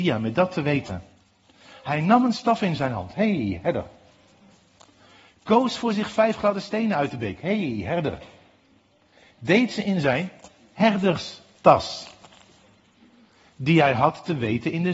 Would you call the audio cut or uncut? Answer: uncut